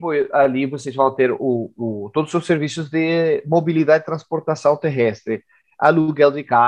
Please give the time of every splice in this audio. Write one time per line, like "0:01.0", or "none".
none